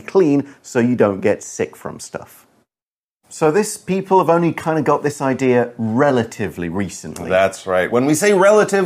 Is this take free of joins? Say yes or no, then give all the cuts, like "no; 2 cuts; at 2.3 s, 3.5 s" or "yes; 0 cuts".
yes; 0 cuts